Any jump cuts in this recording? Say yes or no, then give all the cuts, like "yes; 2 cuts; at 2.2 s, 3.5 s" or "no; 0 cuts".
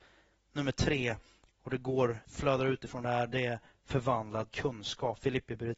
yes; 1 cut; at 2.2 s